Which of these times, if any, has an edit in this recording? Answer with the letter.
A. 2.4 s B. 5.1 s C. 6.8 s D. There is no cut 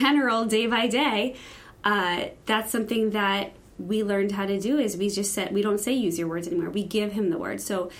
A